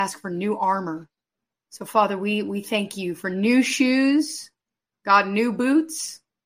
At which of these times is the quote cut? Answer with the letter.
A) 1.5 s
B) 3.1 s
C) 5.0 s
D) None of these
A